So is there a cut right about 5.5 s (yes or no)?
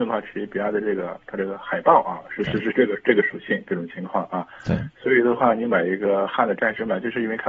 no